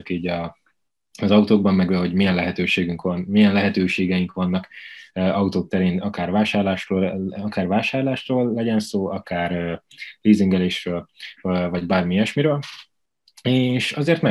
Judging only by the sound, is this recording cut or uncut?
uncut